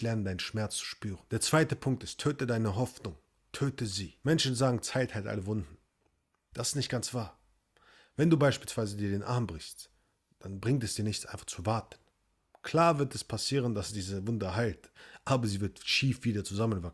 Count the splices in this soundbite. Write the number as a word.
zero